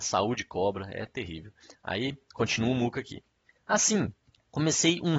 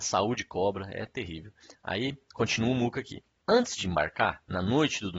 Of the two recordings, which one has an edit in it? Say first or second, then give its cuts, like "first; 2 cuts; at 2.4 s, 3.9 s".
second; 1 cut; at 3.4 s